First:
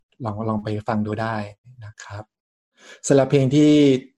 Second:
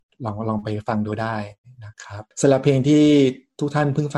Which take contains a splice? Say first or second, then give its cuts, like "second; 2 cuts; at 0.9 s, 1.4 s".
second; 1 cut; at 2.3 s